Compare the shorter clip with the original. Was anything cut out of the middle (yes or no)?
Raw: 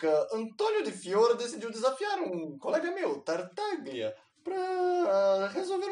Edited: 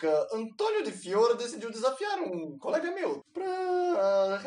yes